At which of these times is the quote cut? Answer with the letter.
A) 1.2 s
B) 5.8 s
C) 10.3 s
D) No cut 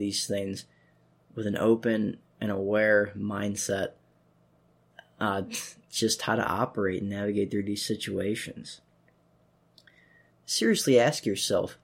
C